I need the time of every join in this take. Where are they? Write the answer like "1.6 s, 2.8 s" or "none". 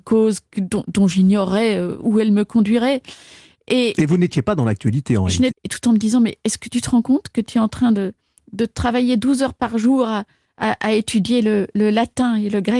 5.5 s